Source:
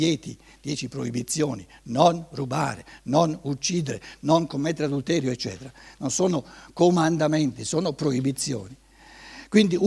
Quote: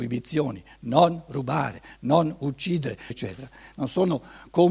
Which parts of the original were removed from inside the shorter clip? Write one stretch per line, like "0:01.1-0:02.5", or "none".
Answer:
0:04.1-0:05.3